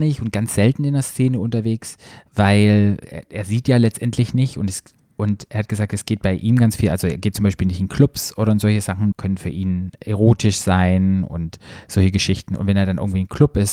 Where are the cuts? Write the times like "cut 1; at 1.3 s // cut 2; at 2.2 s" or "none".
cut 1; at 9.1 s